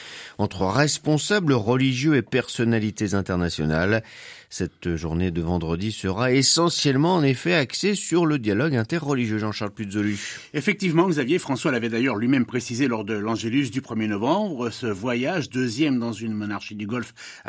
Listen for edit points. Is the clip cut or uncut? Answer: uncut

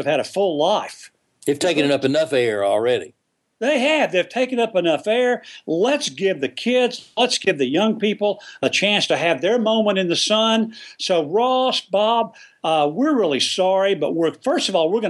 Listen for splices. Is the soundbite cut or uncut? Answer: uncut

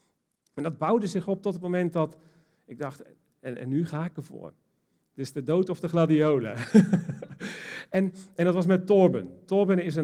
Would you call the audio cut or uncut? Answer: uncut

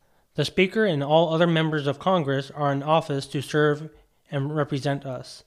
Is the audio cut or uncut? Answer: uncut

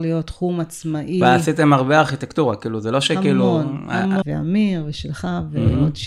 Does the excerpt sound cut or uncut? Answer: cut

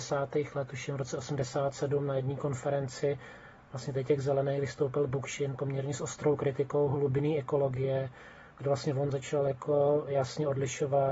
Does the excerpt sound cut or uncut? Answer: uncut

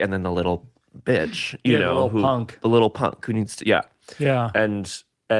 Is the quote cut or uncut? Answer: uncut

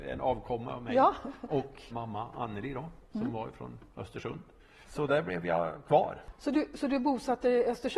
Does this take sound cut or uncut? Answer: cut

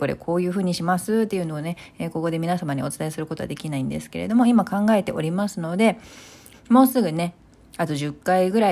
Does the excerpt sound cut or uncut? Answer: cut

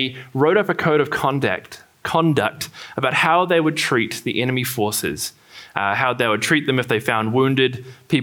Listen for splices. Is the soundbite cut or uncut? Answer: uncut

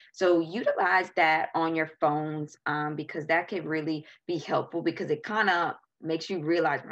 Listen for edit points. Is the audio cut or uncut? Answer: uncut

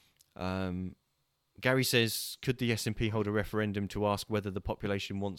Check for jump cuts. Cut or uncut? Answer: uncut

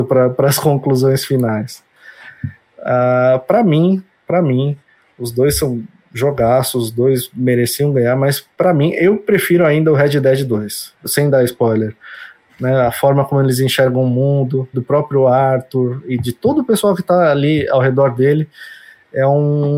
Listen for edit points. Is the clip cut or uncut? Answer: cut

